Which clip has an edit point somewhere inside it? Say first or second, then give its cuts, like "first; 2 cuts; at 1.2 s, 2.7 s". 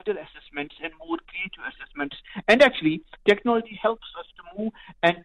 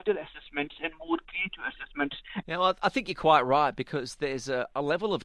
second; 1 cut; at 2.4 s